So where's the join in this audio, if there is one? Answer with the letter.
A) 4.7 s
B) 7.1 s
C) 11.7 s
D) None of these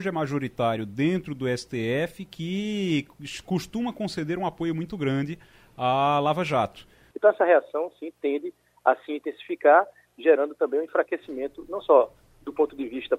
B